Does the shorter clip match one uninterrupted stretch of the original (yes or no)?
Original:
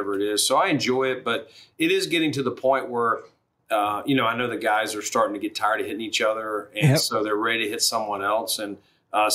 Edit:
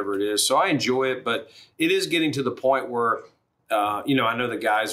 yes